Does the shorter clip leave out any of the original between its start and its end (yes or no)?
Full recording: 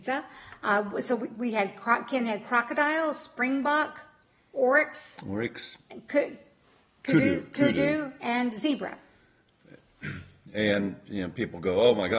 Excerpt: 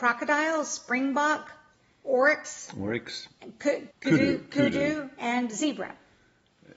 yes